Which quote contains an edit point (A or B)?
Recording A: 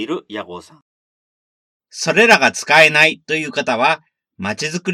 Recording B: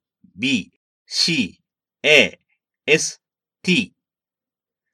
A